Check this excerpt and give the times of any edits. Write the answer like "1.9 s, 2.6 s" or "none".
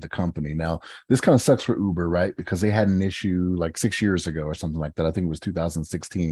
none